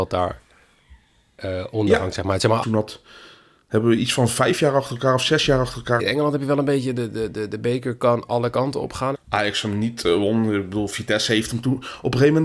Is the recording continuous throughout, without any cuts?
no; 3 cuts; at 2.6 s, 6.0 s, 9.1 s

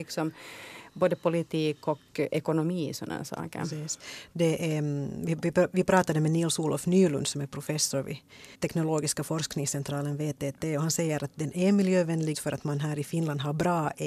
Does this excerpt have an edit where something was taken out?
yes; 2 cuts; at 8.5 s, 12.3 s

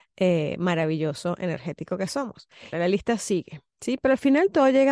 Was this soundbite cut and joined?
yes; 1 cut; at 2.7 s

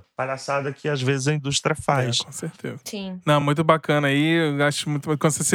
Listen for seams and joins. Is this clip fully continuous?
yes; 0 cuts

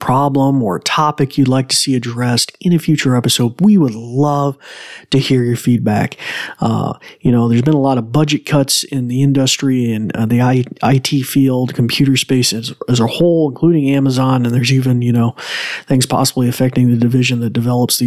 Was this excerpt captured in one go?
yes; 0 cuts

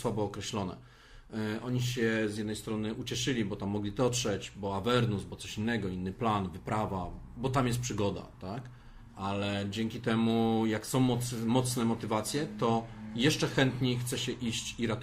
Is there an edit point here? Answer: no; 0 cuts

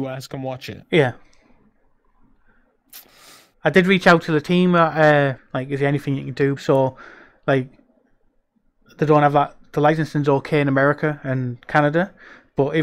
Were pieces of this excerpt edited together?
yes; 2 cuts; at 5.4 s, 6.6 s

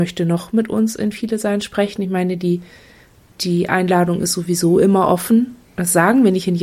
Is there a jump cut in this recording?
no; 0 cuts

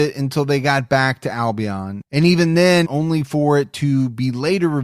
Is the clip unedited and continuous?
no; 1 cut; at 2.8 s

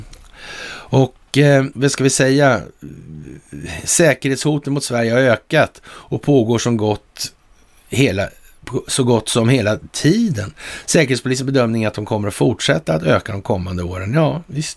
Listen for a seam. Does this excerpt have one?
yes; 1 cut; at 1.7 s

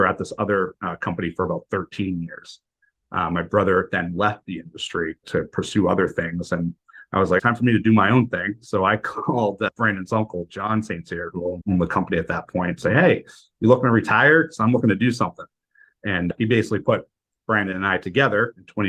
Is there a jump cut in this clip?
yes; 1 cut; at 7.4 s

